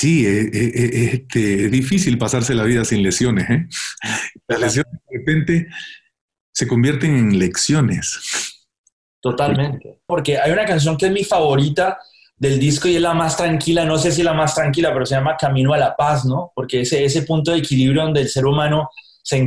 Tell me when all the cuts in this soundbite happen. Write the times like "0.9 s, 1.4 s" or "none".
10.1 s